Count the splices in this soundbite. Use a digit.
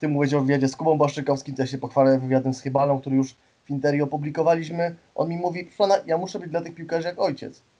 0